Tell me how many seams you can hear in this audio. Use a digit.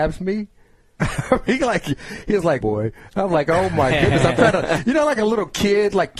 2